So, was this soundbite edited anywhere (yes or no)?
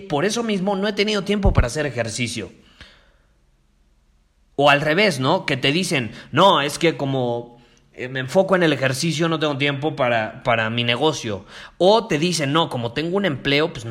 no